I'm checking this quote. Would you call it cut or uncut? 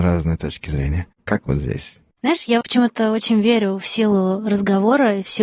cut